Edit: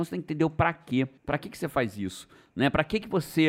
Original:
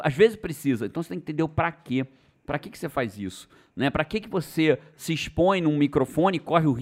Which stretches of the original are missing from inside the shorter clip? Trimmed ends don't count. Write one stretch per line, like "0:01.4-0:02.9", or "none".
0:02.2-0:02.4